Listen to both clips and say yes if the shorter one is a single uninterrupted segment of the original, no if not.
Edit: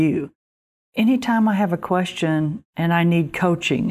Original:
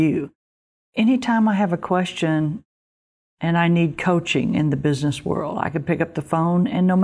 no